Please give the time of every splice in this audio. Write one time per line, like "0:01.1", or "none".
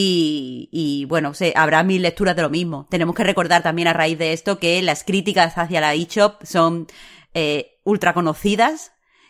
none

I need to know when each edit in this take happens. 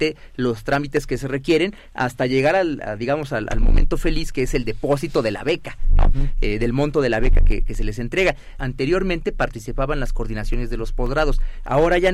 0:08.6

